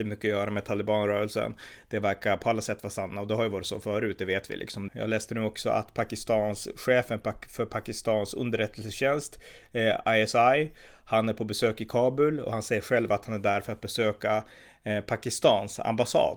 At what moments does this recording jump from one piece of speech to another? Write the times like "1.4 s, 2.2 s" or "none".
4.9 s